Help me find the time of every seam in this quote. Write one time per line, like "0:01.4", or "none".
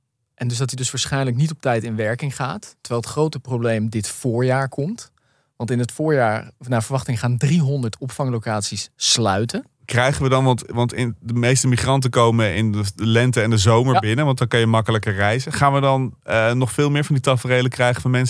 none